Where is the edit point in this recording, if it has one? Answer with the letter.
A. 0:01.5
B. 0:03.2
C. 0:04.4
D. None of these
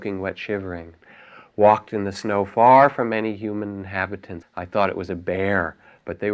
C